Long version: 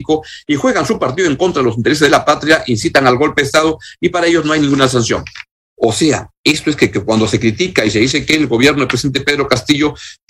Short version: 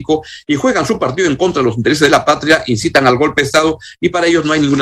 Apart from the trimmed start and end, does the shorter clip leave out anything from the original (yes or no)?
no